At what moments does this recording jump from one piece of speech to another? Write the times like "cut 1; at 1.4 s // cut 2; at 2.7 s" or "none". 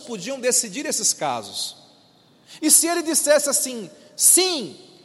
cut 1; at 2.6 s

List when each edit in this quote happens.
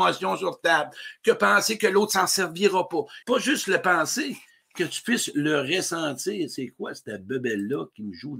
cut 1; at 3.2 s

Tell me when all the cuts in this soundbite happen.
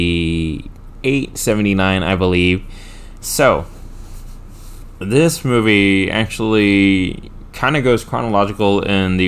cut 1; at 3.2 s

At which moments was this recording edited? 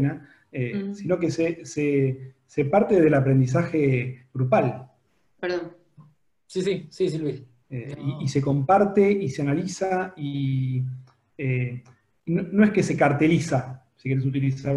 cut 1; at 5.4 s // cut 2; at 7.6 s

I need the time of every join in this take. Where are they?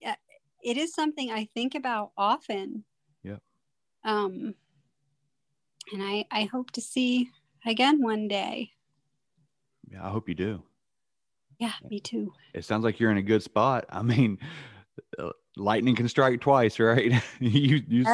none

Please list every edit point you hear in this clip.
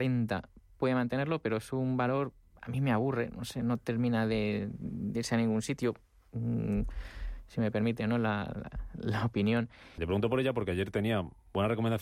cut 1; at 10.0 s

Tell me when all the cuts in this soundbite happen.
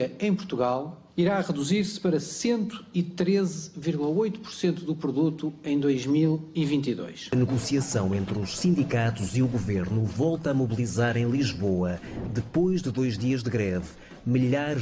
cut 1; at 1.1 s

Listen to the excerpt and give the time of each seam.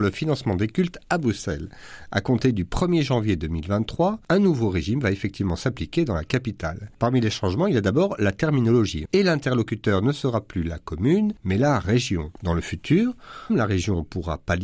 cut 1; at 9.0 s // cut 2; at 12.4 s // cut 3; at 13.5 s

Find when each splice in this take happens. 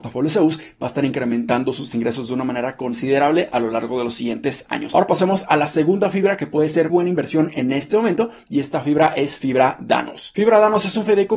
cut 1; at 6.9 s

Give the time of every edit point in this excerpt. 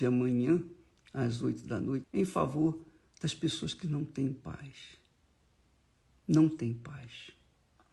cut 1; at 2.0 s

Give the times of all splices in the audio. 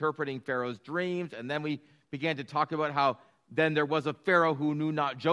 none

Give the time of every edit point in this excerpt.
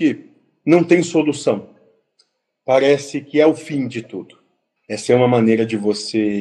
cut 1; at 4.8 s

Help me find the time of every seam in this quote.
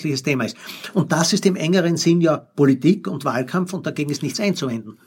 none

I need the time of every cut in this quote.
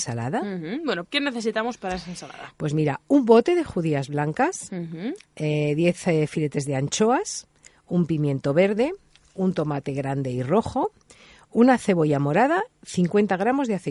cut 1; at 1.0 s

